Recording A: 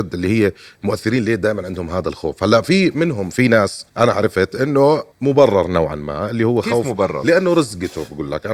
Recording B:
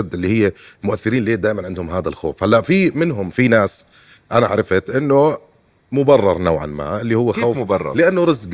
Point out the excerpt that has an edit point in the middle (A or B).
A